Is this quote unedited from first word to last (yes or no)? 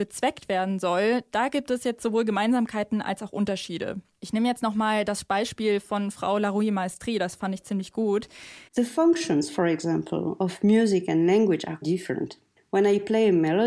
no